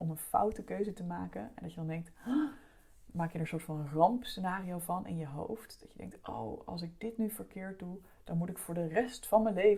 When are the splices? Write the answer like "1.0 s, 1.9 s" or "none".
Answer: none

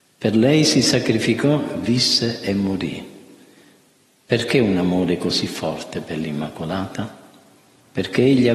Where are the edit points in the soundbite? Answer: none

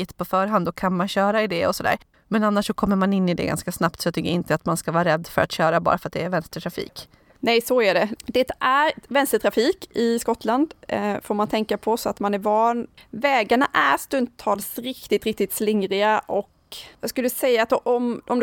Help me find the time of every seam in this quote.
2.1 s, 8.2 s

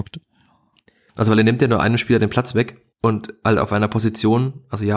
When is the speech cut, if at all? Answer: 1.1 s, 2.9 s

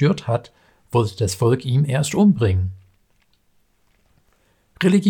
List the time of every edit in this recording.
none

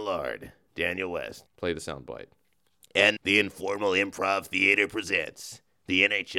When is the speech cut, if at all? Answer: 1.5 s, 3.2 s

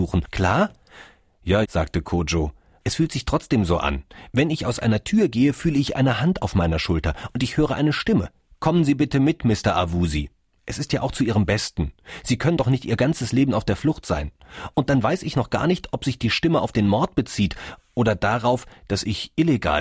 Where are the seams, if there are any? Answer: 1.6 s

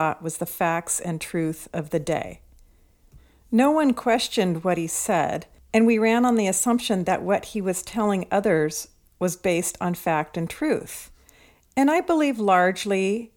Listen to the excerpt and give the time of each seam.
none

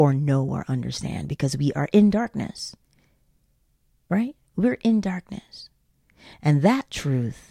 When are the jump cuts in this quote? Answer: 6.3 s

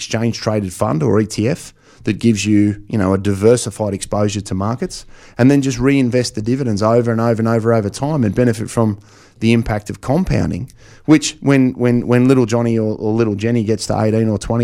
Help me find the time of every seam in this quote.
none

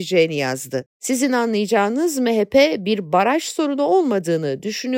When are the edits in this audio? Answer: 0.9 s

